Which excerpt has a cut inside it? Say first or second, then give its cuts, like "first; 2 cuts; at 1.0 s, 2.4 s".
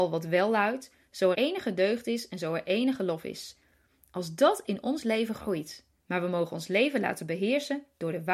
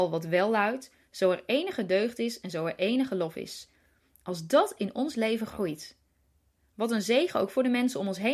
first; 2 cuts; at 1.3 s, 6.0 s